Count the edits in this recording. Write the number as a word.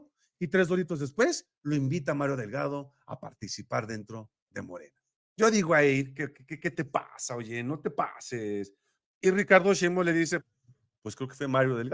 two